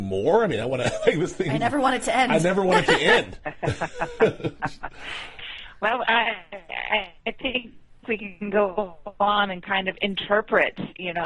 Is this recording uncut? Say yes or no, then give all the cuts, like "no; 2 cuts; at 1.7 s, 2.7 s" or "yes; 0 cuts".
yes; 0 cuts